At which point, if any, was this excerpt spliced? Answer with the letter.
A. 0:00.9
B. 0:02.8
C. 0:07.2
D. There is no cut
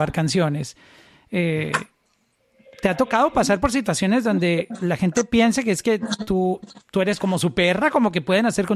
C